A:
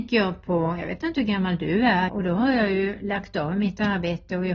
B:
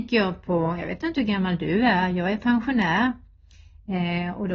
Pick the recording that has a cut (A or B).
A